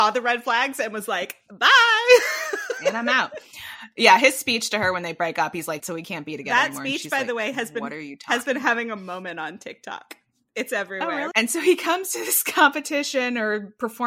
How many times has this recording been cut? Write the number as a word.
two